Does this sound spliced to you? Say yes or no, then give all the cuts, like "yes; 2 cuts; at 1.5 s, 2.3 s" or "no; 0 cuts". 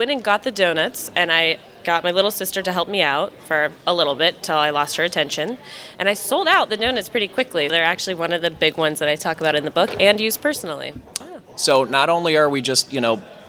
yes; 2 cuts; at 7.7 s, 11.2 s